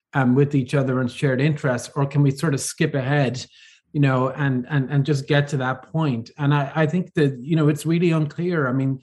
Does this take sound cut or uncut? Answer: uncut